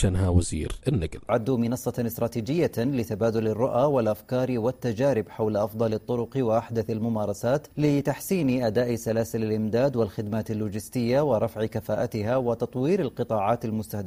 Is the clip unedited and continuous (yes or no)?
no